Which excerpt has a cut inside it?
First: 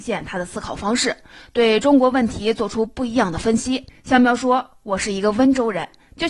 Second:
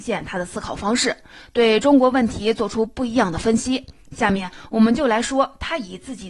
first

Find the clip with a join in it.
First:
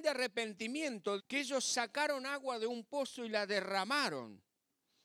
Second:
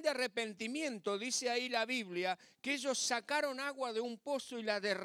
first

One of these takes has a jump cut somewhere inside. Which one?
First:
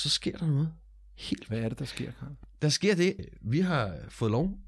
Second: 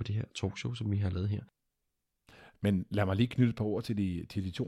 first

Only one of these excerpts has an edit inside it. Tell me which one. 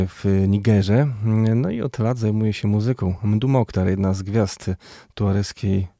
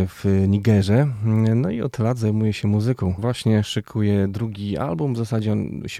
second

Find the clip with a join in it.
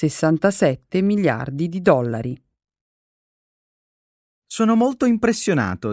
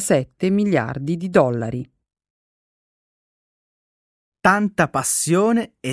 first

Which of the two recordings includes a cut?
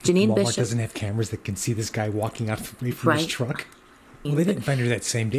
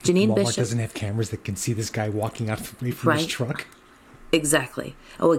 first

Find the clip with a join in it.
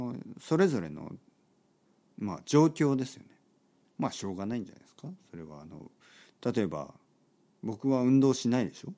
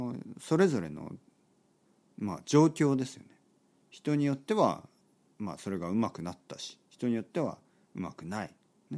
first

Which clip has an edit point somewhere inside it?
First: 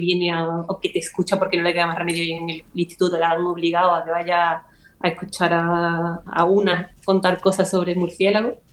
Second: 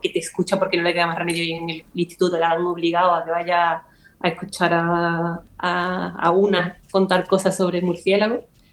first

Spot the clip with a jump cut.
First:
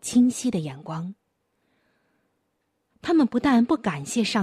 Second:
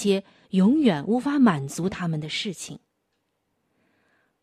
first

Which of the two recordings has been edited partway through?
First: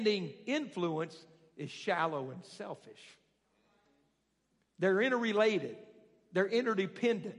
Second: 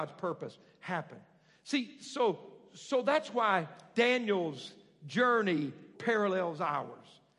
second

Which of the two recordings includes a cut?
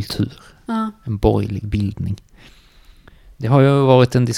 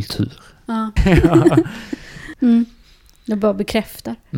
second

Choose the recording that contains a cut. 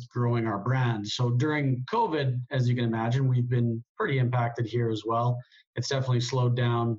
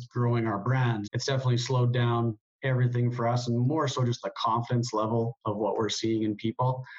second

